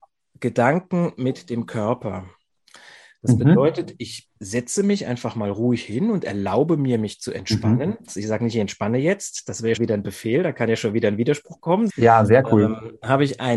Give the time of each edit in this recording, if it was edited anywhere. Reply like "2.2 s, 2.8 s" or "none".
8.1 s, 9.8 s, 11.9 s

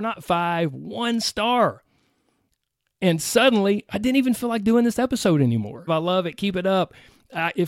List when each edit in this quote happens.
5.9 s

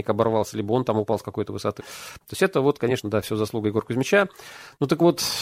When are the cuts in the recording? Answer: 1.8 s

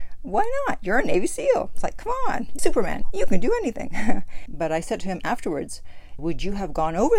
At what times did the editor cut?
2.6 s, 4.5 s, 6.2 s

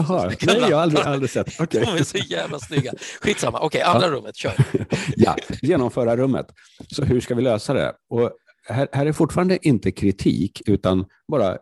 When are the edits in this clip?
none

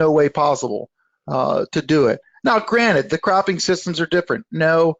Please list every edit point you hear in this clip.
none

